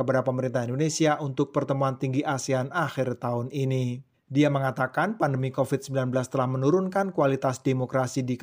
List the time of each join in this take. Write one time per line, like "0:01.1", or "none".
0:04.1